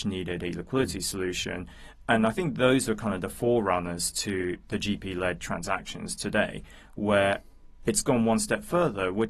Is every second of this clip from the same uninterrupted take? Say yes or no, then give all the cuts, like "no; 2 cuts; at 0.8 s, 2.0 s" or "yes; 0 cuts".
yes; 0 cuts